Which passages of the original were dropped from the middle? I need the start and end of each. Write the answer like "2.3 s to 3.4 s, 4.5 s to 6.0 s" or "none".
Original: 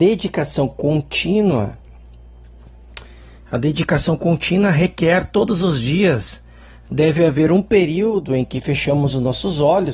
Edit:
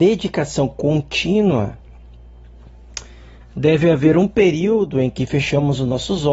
3.4 s to 6.7 s